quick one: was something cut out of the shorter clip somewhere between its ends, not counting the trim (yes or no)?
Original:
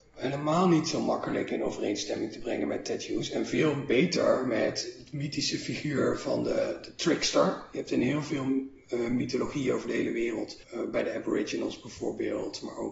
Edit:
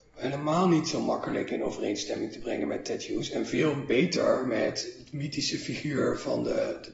no